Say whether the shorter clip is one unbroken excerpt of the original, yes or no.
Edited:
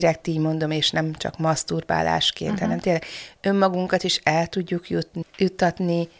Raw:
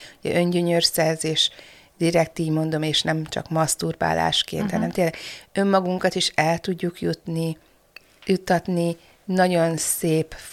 no